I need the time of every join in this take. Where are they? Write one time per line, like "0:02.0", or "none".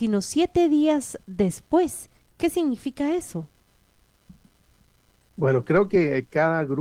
none